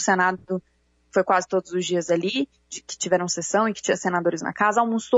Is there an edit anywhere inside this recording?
no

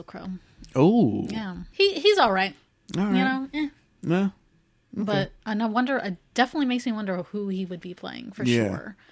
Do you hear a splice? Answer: yes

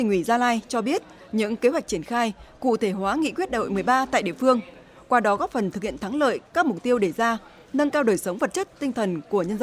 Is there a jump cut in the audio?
no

